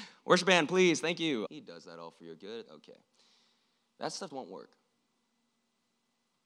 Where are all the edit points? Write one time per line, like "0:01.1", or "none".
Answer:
0:01.5
0:02.7
0:04.3

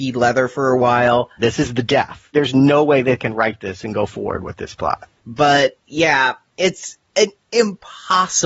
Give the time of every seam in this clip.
0:01.4
0:05.2

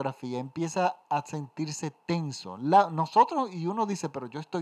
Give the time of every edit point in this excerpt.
none

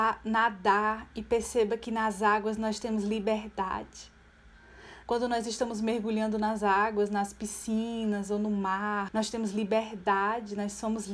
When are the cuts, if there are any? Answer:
0:05.0
0:09.1

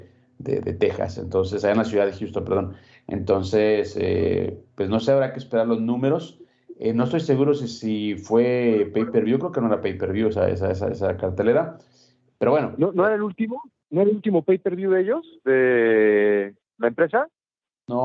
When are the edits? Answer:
none

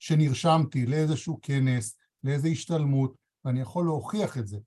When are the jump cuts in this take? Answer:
none

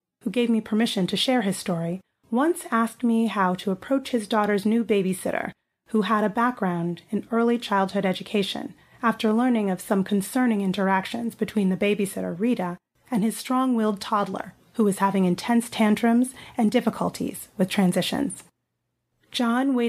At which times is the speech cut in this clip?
0:14.6

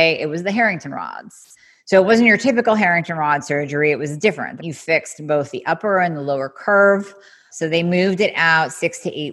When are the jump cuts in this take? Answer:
0:04.6
0:07.5

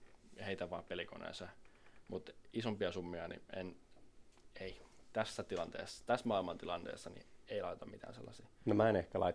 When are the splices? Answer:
none

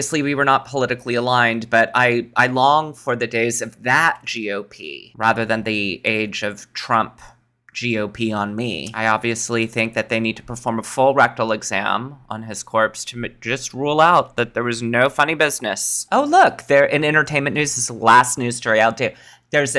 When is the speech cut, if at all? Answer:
none

